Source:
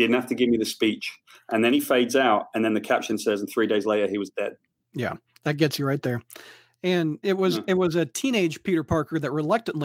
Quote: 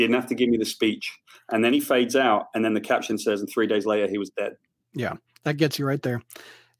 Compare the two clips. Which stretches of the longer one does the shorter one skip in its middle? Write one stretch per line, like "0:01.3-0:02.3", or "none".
none